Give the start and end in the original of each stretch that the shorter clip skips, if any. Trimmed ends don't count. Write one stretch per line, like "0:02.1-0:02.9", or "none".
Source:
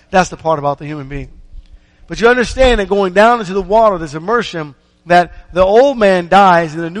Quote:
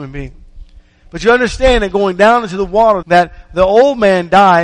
0:04.0-0:05.0